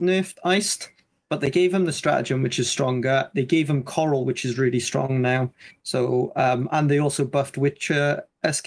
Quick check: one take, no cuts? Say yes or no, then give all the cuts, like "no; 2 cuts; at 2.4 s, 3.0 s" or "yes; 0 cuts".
yes; 0 cuts